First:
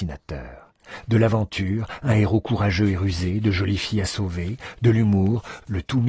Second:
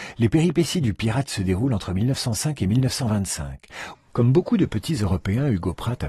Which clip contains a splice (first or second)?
second